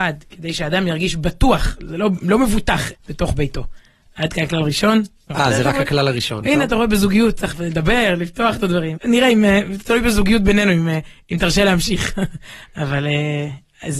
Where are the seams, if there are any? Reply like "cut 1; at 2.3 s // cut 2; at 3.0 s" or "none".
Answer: cut 1; at 2.9 s // cut 2; at 5.3 s // cut 3; at 9.0 s

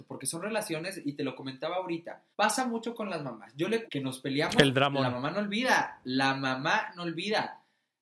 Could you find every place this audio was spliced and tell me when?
cut 1; at 2.3 s // cut 2; at 3.9 s

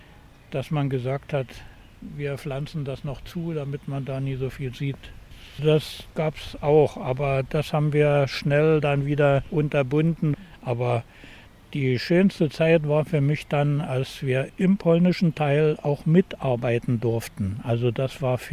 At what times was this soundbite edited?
cut 1; at 5.6 s

